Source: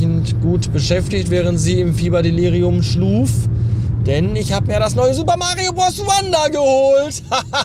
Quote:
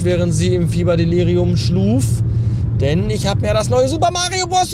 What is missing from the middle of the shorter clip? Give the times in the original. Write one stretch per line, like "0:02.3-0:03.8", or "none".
none